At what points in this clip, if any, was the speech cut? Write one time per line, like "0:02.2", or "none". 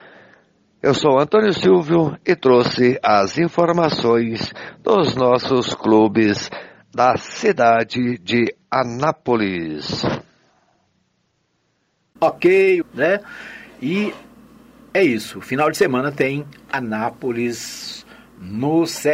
0:12.8